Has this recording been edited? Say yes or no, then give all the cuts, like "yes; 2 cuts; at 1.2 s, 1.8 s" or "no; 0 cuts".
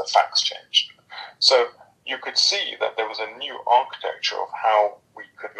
no; 0 cuts